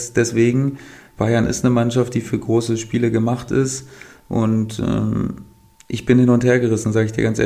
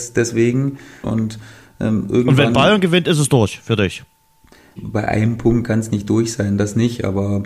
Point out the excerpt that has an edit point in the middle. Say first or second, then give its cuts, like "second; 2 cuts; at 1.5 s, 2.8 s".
second; 2 cuts; at 1.0 s, 4.8 s